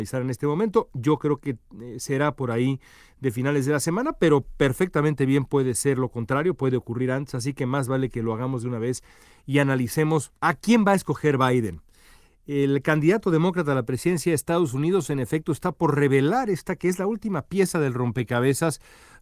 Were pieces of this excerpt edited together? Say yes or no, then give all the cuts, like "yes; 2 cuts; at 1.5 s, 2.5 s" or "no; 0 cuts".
no; 0 cuts